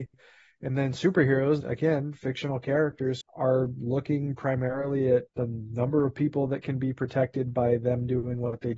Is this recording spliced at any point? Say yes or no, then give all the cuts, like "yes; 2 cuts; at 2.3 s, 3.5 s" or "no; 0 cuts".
yes; 3 cuts; at 1.6 s, 3.2 s, 5.3 s